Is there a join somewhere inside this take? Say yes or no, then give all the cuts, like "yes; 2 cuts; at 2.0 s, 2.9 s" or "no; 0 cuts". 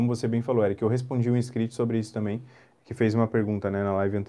no; 0 cuts